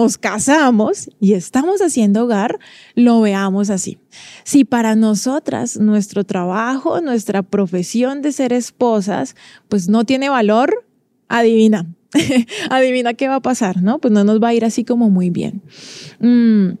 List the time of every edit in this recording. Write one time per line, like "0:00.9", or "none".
none